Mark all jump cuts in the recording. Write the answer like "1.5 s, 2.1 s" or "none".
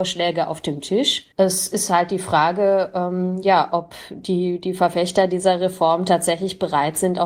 1.3 s